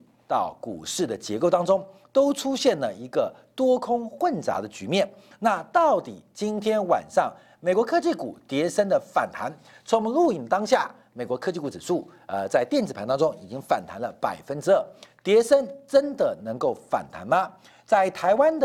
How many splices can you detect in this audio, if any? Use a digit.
0